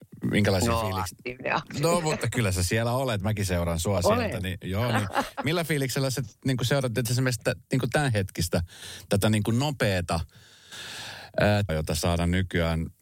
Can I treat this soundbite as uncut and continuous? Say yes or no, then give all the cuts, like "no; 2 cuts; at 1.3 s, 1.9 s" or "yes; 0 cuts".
no; 1 cut; at 11.7 s